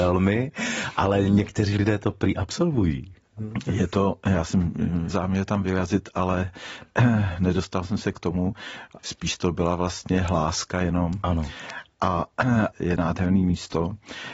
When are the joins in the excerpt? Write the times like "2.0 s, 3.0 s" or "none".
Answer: 5.1 s, 9.0 s, 12.7 s